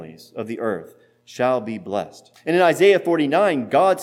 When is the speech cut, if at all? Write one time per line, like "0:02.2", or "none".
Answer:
0:02.3